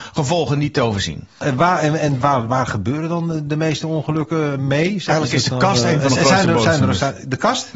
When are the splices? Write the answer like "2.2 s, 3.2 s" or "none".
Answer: 2.2 s